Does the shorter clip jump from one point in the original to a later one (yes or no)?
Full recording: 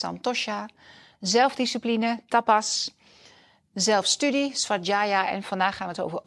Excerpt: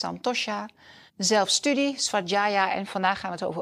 yes